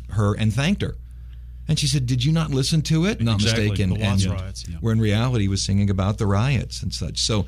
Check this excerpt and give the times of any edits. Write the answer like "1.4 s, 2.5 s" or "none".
3.2 s, 4.6 s